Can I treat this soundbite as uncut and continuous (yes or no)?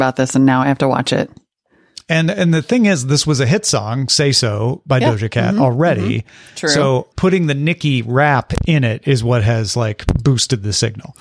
no